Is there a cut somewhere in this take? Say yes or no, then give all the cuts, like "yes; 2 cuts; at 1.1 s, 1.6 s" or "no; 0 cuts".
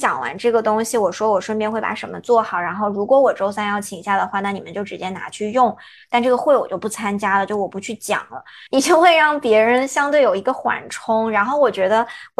yes; 1 cut; at 8.7 s